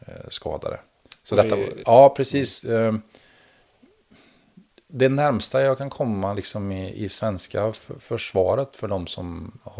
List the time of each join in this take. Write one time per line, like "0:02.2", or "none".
0:01.8